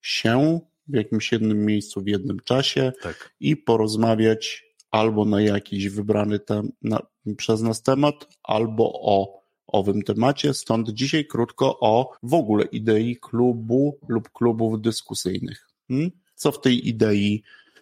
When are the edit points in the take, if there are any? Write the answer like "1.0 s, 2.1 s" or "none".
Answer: 12.2 s